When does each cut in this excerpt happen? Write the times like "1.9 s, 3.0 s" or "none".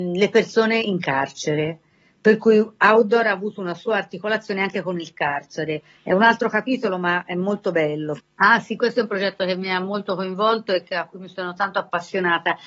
8.2 s